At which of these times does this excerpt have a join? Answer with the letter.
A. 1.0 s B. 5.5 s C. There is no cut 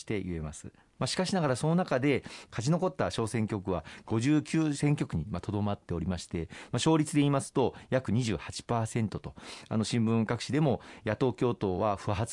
A